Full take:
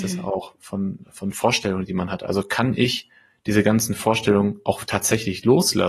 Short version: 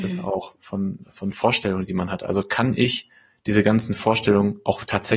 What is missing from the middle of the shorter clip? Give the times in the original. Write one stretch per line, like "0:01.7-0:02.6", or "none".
none